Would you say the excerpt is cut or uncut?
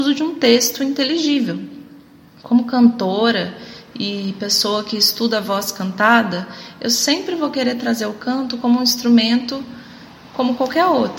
uncut